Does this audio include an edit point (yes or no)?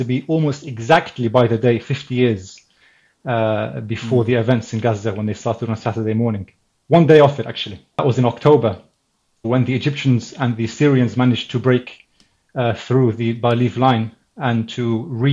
yes